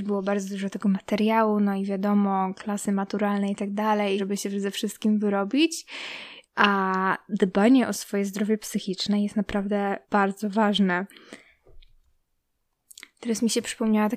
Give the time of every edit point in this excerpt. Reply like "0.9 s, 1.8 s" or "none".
4.2 s, 6.4 s, 10.0 s

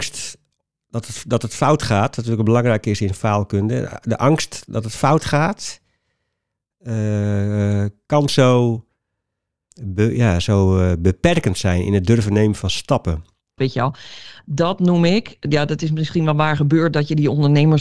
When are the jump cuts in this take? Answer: 9.7 s, 13.6 s

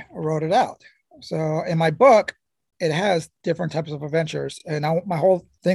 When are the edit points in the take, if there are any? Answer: none

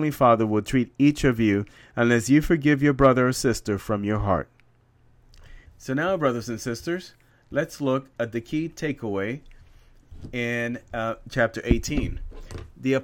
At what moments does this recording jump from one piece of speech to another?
5.7 s

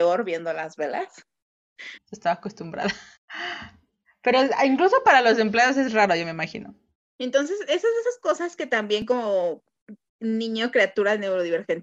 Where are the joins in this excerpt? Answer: 2.0 s

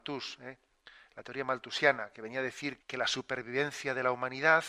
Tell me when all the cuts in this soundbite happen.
2.8 s

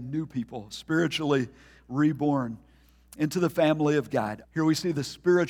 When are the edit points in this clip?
4.4 s

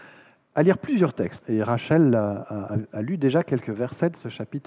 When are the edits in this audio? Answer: 1.4 s

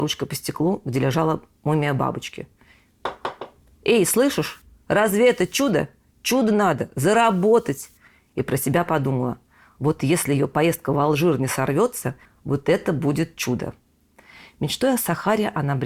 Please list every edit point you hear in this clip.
12.3 s

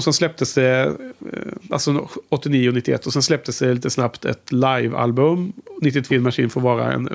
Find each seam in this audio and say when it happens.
6.1 s

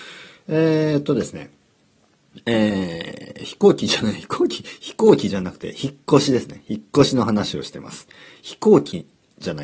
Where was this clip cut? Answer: none

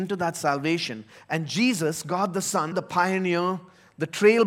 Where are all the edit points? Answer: 2.7 s

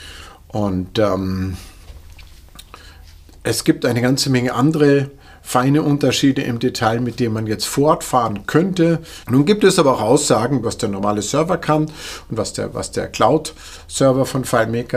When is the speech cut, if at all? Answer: 9.2 s, 10.6 s

